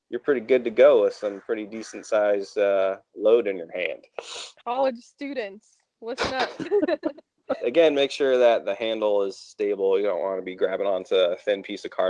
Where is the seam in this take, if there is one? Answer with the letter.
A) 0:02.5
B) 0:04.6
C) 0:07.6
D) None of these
C